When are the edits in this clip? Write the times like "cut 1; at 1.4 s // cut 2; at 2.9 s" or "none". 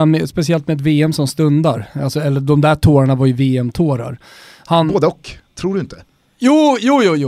none